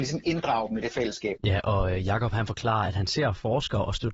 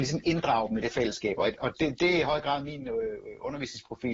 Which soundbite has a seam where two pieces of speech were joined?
first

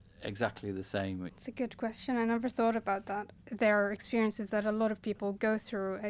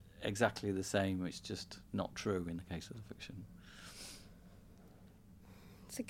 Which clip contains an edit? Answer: first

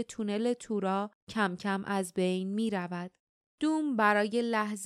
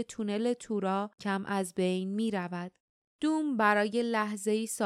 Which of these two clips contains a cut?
second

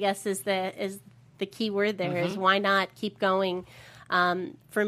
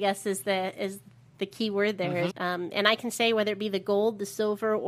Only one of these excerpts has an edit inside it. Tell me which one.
second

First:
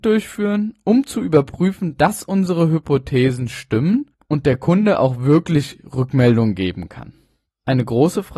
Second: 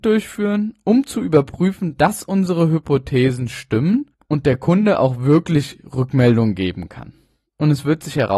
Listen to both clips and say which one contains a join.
second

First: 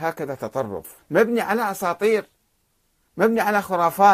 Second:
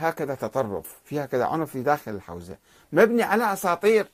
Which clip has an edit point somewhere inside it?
first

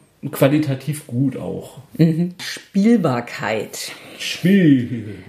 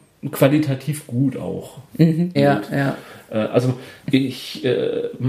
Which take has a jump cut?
second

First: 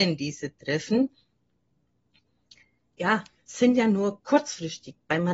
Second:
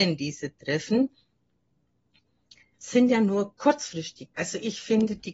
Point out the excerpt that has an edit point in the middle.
second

